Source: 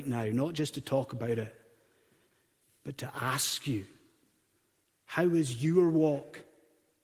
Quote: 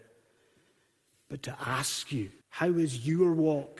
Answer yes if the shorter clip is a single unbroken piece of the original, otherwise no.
no